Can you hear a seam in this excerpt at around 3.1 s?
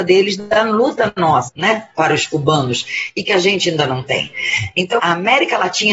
no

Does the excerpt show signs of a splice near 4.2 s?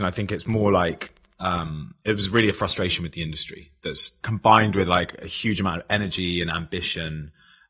yes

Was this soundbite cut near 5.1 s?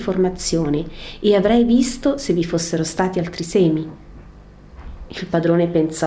yes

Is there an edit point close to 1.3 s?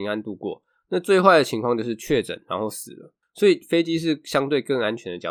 no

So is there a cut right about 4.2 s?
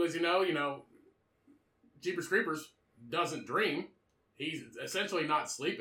no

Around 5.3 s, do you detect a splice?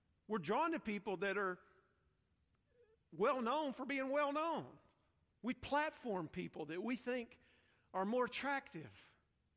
yes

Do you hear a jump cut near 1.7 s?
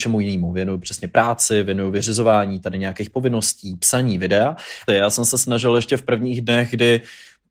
no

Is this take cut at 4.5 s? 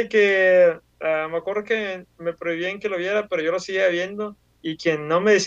yes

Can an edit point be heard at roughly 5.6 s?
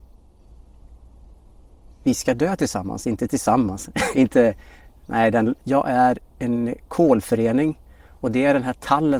yes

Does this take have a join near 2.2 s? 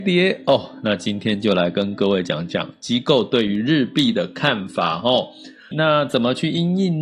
no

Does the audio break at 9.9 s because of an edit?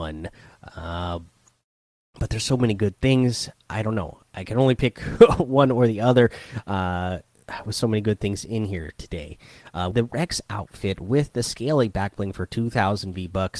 yes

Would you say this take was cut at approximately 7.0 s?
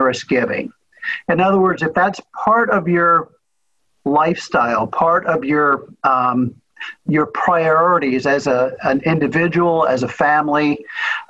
no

